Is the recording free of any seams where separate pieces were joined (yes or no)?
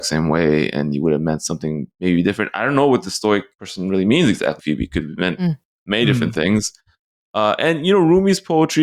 no